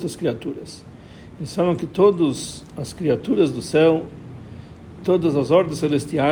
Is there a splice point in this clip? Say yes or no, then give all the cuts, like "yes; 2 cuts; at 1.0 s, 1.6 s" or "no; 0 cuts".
no; 0 cuts